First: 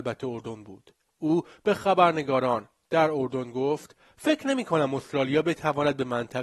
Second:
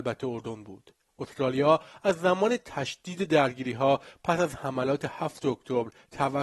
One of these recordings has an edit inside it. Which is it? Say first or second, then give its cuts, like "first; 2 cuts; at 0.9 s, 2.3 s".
first; 1 cut; at 1.1 s